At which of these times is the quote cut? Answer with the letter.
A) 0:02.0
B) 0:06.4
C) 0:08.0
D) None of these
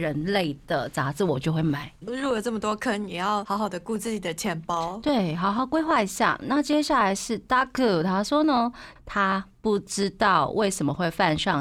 A